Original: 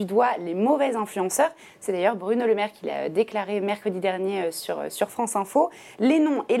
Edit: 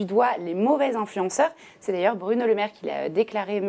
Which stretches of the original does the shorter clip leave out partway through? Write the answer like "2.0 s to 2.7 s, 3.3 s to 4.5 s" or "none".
none